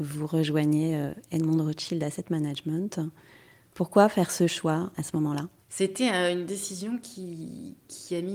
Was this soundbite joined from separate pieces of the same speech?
no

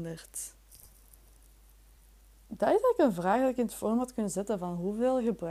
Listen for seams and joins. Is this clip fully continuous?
yes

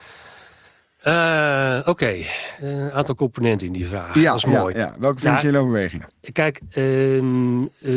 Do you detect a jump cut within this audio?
no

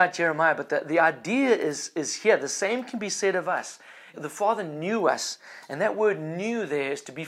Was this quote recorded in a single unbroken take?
no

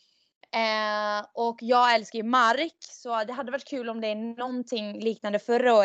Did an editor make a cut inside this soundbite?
no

